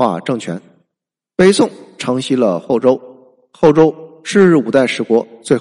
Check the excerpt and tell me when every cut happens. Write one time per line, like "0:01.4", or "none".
0:01.3